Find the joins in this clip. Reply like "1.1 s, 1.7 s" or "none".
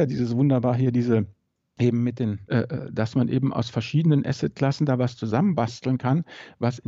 2.4 s

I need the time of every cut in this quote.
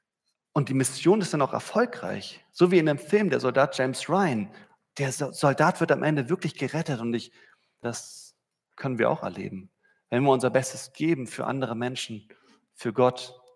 7.8 s

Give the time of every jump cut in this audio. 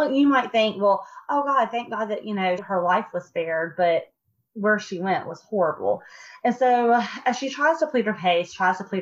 2.6 s

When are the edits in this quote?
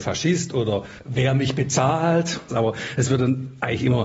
2.5 s

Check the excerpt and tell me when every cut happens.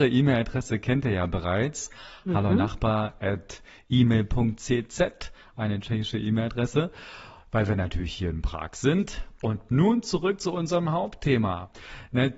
none

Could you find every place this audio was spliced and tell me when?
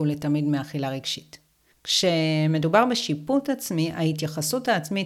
1.7 s

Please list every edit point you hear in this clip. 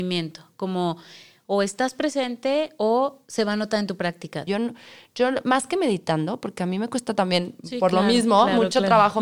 4.5 s

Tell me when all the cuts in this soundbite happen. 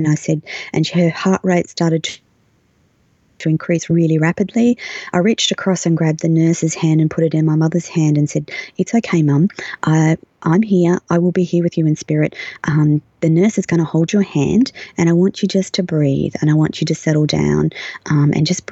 none

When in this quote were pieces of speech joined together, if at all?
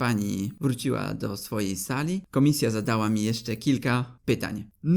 none

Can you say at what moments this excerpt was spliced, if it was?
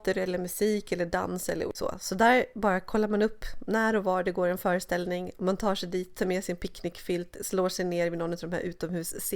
none

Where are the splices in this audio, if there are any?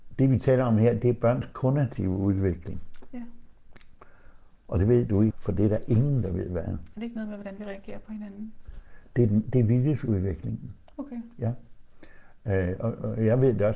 5.3 s

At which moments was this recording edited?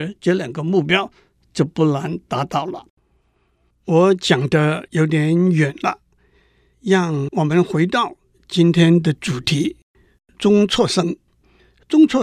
none

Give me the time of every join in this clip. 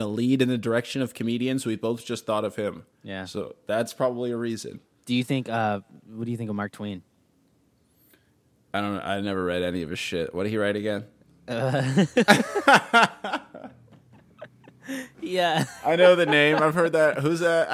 none

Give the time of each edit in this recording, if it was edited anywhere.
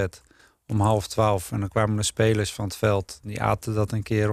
none

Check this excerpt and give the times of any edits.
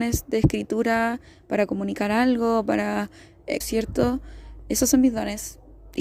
3.6 s

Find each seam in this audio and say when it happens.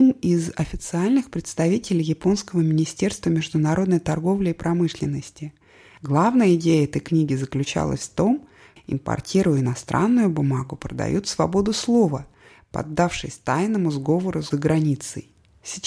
8.8 s

